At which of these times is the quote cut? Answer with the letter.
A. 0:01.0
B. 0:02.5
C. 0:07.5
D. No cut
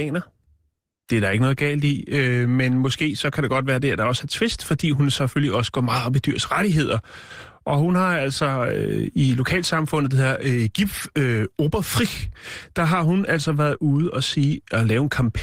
D